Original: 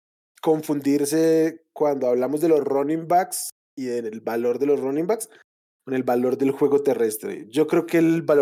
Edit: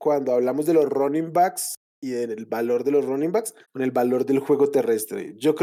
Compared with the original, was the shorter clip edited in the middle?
yes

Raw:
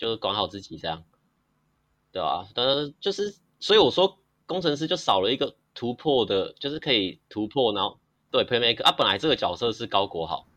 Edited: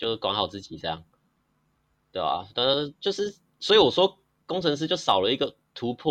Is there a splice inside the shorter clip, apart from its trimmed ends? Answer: no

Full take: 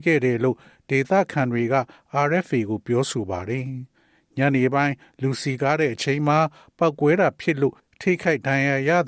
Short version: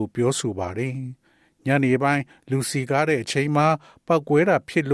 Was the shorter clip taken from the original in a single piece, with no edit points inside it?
yes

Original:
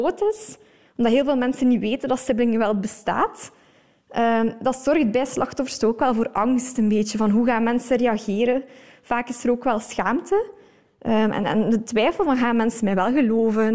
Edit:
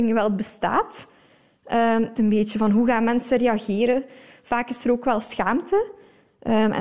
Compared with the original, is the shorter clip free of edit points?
no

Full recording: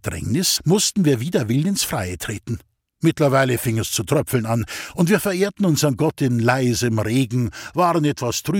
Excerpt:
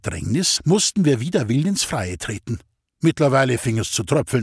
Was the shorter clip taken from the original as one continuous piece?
yes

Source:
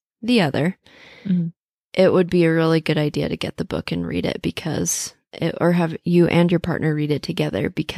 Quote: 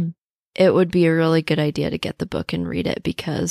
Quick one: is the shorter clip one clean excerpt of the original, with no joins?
yes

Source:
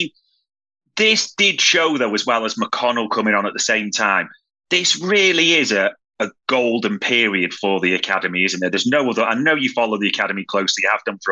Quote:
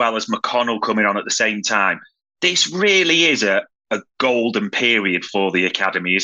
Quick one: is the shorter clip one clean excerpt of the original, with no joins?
yes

